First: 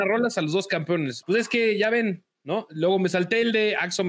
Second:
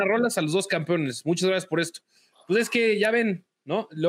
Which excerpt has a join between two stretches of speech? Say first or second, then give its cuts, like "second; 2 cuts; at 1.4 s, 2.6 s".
first; 1 cut; at 1.2 s